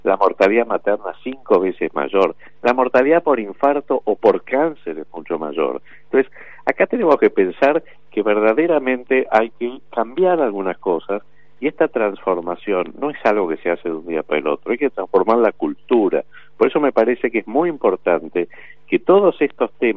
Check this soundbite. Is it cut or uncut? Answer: uncut